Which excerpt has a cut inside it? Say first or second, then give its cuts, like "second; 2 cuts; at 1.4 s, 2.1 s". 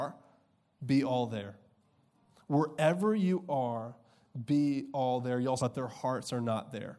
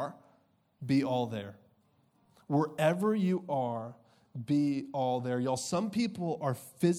first; 1 cut; at 5.6 s